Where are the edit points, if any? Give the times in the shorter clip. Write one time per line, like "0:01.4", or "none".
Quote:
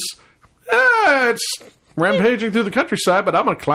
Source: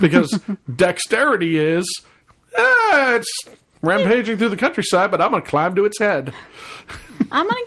none